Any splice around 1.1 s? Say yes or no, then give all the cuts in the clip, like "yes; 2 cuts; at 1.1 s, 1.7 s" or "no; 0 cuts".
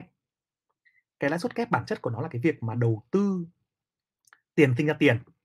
no; 1 cut; at 3.8 s